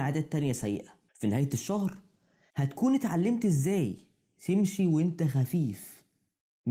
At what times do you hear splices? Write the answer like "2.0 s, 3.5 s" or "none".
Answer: 1.1 s